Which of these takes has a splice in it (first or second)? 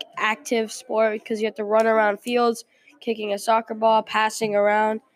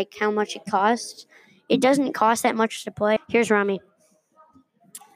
second